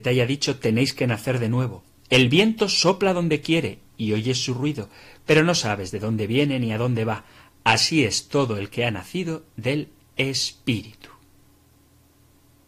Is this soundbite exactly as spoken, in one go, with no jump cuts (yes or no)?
yes